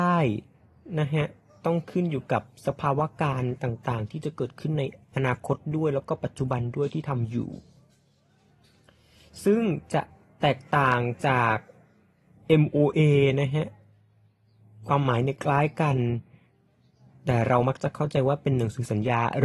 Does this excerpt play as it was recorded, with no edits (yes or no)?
yes